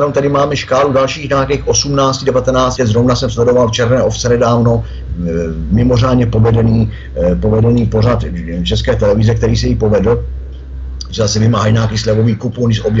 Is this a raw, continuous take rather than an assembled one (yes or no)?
no